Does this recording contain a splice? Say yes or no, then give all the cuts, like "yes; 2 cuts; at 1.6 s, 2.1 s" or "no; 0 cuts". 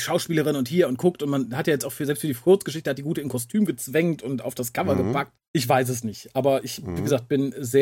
no; 0 cuts